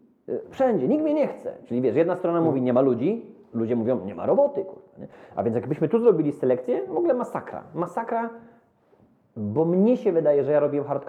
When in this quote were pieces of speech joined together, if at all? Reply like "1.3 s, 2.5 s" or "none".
none